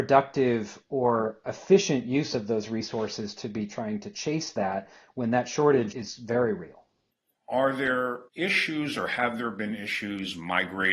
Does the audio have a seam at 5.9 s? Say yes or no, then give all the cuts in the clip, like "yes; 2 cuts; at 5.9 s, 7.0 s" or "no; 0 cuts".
yes; 2 cuts; at 5.9 s, 8.3 s